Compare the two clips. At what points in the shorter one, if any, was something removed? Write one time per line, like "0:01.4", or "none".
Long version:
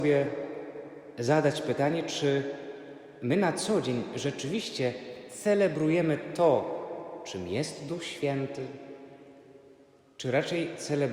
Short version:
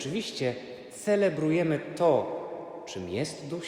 none